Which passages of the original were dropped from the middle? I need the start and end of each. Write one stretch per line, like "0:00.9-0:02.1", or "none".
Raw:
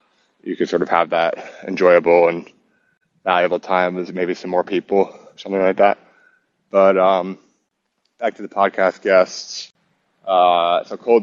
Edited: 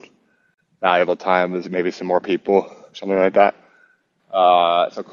0:06.6-0:10.1